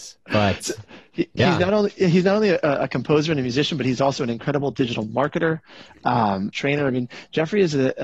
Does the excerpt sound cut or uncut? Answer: cut